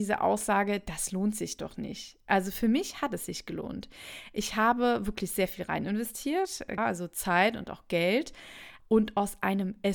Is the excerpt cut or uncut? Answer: cut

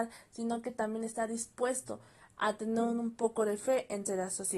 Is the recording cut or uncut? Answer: uncut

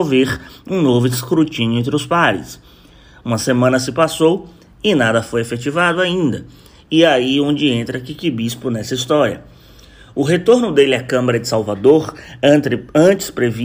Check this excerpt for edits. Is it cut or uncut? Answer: uncut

